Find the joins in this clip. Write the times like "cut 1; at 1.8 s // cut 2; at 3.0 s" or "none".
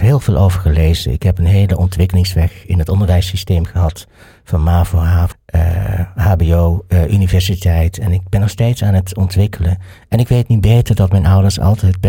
cut 1; at 5.3 s